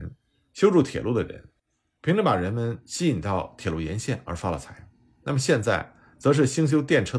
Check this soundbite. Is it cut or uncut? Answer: uncut